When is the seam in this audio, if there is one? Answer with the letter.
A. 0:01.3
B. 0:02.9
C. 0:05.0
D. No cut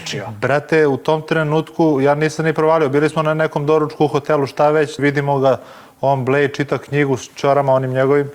C